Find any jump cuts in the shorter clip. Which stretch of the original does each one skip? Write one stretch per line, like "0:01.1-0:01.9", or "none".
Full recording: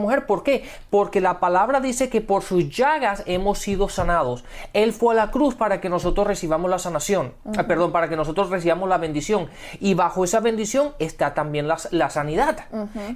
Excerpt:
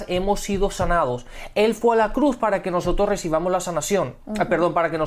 none